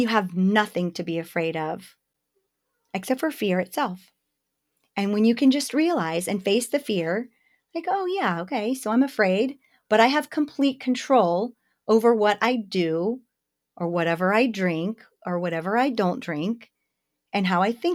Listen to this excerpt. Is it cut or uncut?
uncut